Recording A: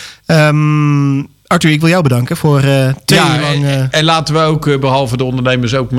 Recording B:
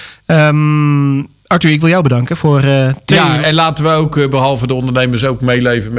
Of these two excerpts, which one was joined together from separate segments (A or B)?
B